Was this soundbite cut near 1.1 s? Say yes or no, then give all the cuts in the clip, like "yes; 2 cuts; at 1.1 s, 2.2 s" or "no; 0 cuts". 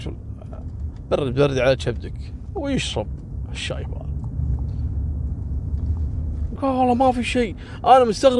no; 1 cut; at 6.6 s